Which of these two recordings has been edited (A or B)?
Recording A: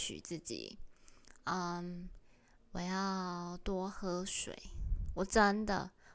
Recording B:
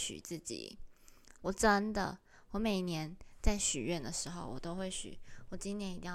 B